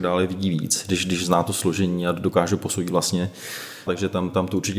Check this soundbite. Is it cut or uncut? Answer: cut